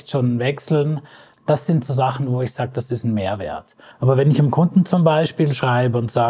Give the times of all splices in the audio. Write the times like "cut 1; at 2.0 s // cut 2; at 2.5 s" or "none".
cut 1; at 1.3 s // cut 2; at 3.9 s